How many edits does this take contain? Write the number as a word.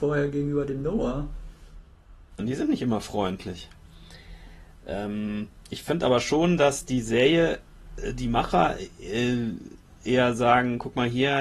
one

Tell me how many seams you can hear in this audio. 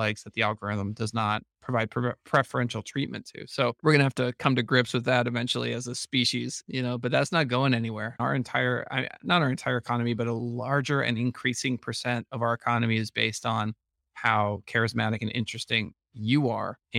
zero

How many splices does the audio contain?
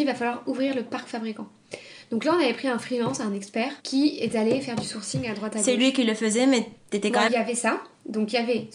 two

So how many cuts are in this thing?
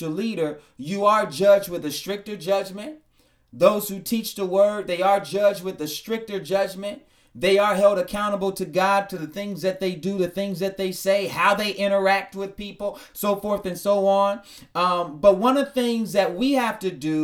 one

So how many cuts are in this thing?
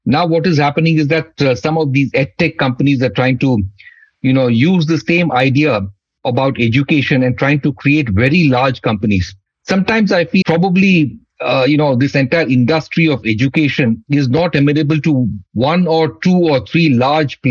one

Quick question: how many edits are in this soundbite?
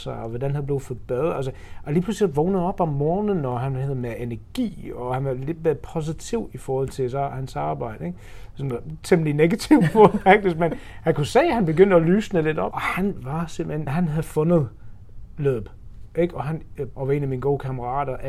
three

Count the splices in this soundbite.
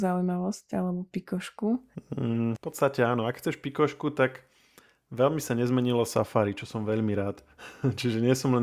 one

